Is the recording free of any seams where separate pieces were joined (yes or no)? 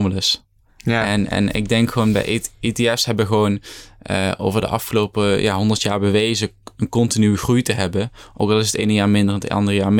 yes